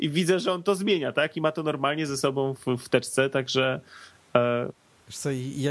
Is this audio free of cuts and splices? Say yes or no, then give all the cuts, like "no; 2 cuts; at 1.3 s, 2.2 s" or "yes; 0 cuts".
yes; 0 cuts